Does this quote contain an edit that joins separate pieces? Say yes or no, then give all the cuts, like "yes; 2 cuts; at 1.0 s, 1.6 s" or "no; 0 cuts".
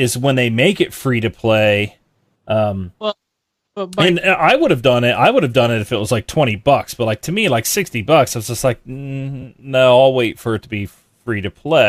yes; 1 cut; at 2.3 s